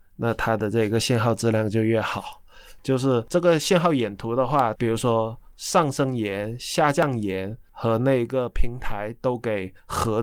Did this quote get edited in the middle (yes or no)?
yes